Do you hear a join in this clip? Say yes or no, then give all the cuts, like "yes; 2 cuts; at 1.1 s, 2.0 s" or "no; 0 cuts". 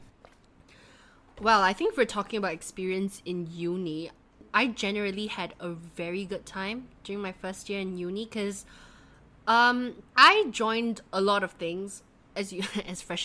yes; 1 cut; at 10.1 s